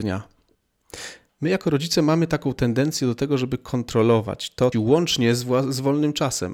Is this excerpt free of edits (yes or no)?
no